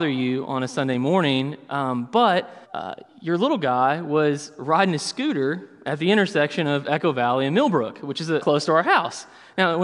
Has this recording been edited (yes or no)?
yes